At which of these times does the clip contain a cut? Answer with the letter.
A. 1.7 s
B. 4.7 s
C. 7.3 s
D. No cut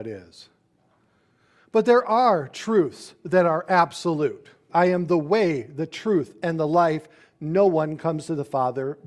B